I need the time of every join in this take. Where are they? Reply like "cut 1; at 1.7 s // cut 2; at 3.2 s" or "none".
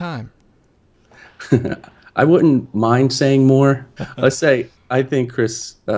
cut 1; at 4.0 s